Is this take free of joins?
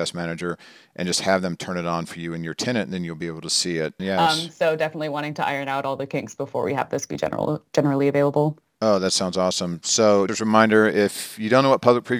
no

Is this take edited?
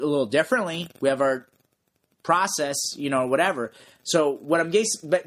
no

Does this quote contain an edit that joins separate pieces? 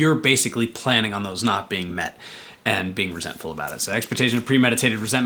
no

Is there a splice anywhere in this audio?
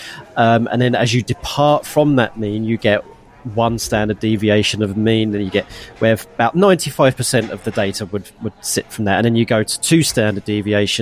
no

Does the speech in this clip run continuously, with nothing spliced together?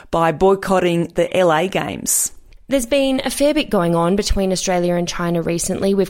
no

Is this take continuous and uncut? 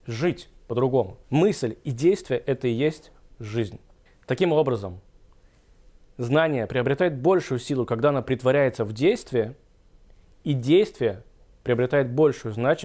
no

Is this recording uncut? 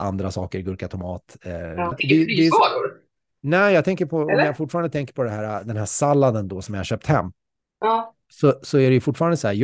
no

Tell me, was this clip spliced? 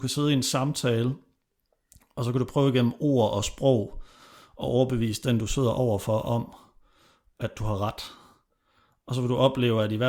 no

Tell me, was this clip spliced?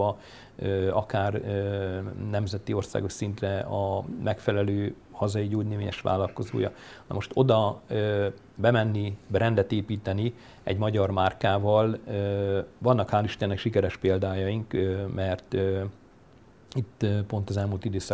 no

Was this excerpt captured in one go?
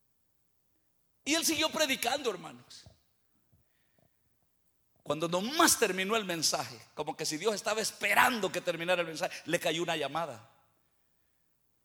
yes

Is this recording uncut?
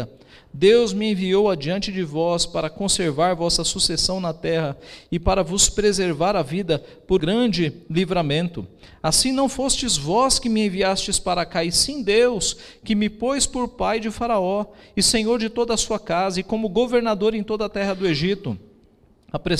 no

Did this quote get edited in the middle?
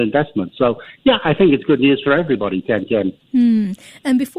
no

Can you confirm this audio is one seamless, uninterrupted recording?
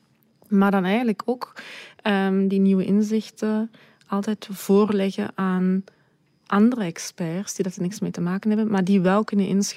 yes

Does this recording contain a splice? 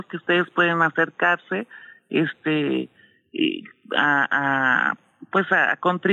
no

